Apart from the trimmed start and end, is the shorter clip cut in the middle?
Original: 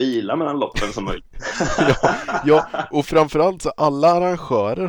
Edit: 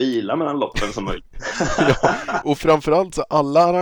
yes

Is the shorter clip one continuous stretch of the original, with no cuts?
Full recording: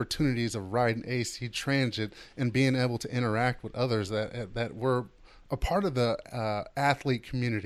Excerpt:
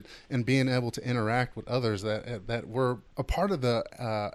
no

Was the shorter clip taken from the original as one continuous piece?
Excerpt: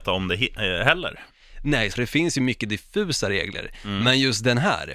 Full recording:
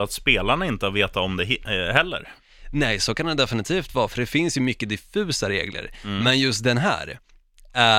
no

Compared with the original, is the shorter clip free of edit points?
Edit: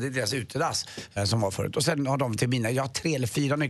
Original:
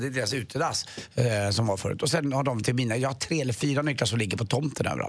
no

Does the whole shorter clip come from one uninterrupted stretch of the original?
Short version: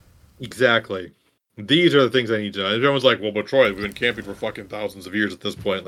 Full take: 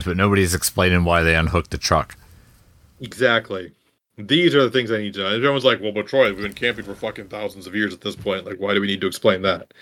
yes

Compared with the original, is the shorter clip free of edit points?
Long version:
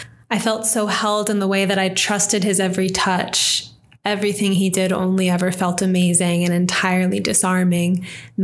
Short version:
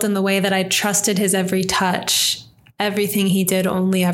yes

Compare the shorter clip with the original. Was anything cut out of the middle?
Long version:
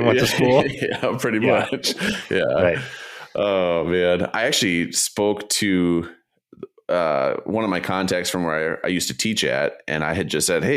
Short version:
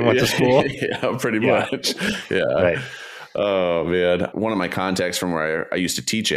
yes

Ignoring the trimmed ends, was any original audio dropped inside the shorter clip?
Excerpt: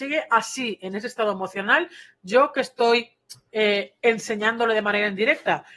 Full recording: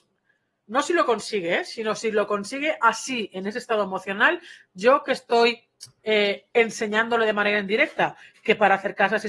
no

